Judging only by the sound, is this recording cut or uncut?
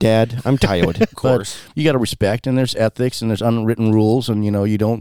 cut